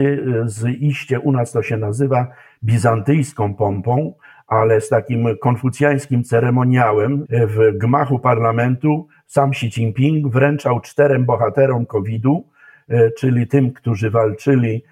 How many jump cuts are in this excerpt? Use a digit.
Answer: 1